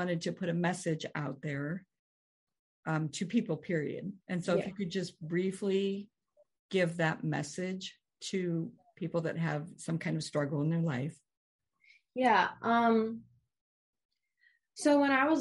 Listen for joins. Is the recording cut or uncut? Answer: cut